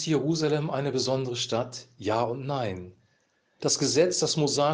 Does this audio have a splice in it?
yes; 1 cut; at 3.6 s

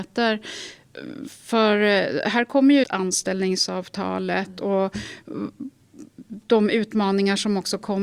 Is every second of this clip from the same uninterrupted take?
no; 1 cut; at 2.8 s

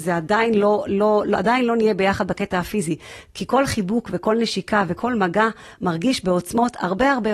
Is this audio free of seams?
yes; 0 cuts

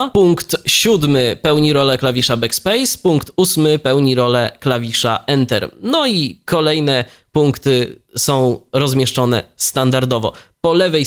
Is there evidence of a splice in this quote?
no; 0 cuts

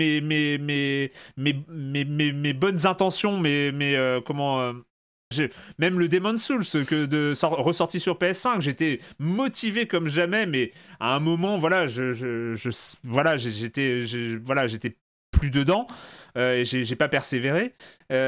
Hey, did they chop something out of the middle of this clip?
yes; 1 cut; at 5.3 s

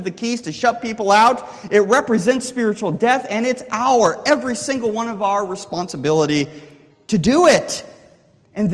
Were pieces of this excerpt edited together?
no; 0 cuts

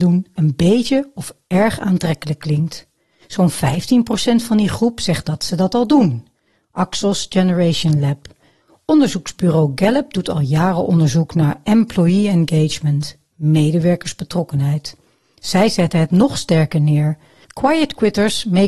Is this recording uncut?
yes; 0 cuts

